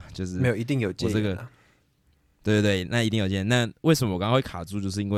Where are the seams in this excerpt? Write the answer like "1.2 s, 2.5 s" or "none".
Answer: none

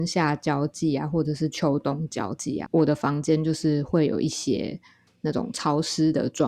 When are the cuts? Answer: 2.7 s

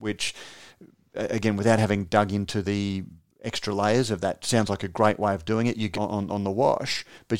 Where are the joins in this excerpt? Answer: 5.9 s

